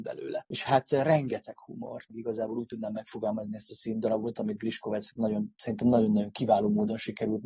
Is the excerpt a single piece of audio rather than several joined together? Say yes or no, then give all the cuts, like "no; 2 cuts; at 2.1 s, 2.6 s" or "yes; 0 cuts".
no; 1 cut; at 2.1 s